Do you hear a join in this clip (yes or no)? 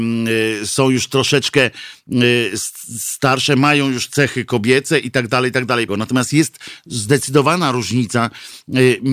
yes